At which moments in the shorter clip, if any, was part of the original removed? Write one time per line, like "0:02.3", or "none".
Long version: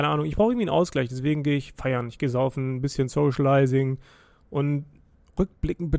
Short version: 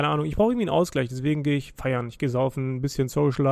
none